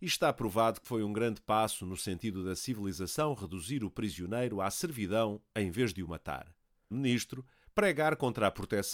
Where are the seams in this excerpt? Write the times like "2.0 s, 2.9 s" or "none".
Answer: 6.9 s